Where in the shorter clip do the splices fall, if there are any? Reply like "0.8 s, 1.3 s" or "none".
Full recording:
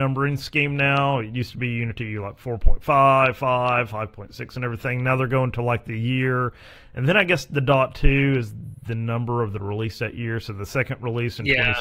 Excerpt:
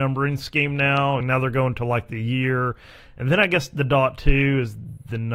1.2 s